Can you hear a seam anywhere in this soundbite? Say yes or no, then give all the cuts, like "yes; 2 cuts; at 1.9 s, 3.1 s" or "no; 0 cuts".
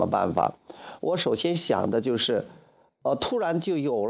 no; 0 cuts